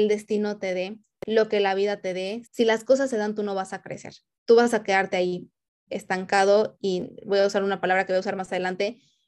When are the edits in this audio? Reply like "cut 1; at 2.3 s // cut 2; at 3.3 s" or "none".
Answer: cut 1; at 2.4 s